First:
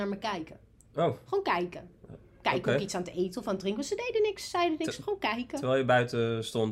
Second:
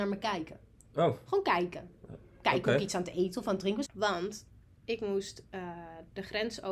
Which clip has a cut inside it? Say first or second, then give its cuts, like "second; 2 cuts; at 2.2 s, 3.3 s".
second; 1 cut; at 3.8 s